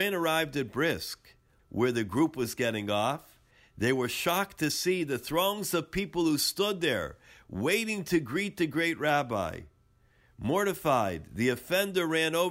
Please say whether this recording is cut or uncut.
cut